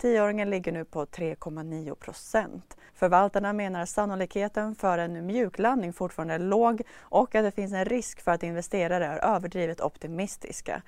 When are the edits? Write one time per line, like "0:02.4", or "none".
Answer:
0:02.9

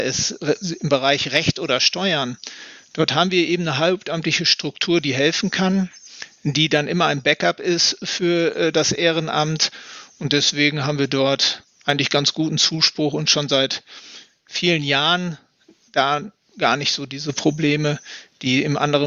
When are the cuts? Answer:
none

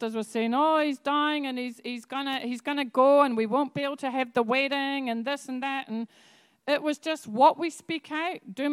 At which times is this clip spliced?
none

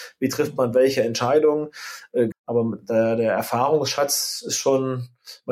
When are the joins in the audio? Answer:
0:02.3

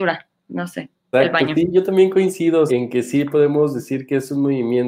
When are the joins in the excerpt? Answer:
0:01.1
0:02.7

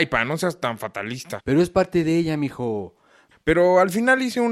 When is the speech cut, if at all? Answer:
0:01.4
0:03.3

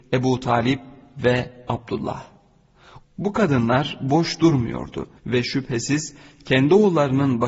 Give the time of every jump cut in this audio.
0:03.0
0:05.2

